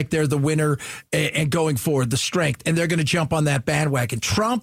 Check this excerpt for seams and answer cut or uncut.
uncut